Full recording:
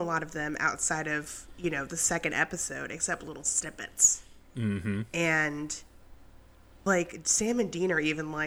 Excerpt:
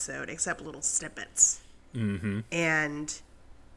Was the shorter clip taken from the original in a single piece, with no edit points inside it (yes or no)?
yes